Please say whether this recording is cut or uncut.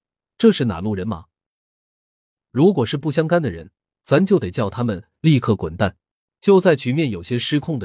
cut